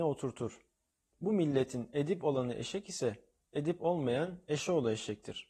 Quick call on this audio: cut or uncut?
uncut